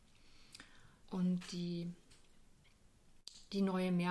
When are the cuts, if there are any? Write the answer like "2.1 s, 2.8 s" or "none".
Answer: 1.0 s